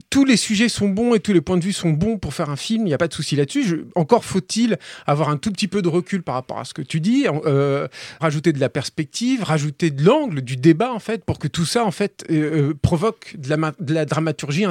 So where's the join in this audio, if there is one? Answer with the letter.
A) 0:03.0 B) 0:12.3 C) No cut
A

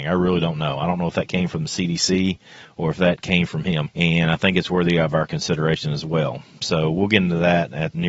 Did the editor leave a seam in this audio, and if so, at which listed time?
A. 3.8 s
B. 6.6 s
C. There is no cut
A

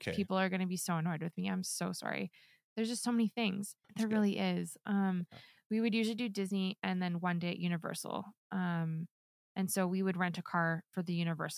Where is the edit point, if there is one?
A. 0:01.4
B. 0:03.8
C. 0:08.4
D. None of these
B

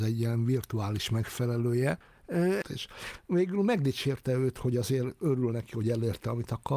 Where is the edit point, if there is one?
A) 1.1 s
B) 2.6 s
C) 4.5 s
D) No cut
B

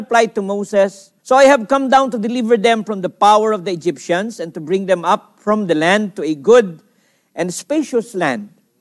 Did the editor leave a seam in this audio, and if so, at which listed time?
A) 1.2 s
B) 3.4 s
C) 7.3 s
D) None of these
A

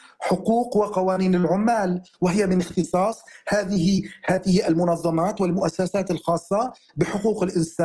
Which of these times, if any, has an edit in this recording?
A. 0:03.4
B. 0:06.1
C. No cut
C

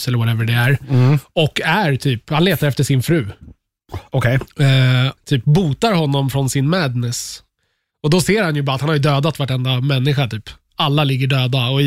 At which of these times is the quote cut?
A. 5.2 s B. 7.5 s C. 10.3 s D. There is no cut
A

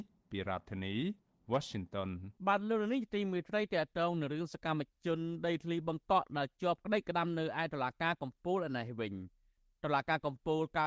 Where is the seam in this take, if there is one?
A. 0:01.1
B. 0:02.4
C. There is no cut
B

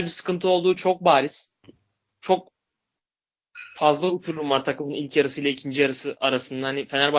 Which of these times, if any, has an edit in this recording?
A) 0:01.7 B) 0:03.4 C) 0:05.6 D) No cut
D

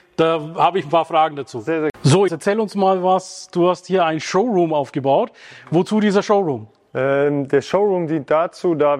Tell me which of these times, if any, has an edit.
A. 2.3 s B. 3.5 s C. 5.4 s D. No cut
A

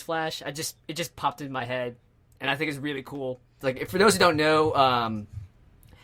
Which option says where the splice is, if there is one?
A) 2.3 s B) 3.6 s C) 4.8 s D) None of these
B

